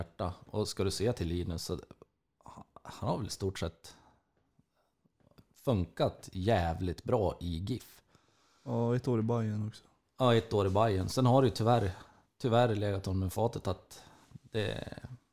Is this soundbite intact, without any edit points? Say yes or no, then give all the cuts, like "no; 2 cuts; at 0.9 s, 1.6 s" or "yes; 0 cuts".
yes; 0 cuts